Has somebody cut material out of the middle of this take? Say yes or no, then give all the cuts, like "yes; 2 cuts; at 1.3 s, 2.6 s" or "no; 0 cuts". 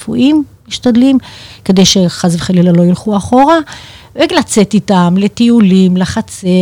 no; 0 cuts